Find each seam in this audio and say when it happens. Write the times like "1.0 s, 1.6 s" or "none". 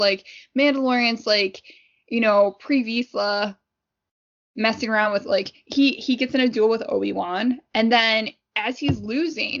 none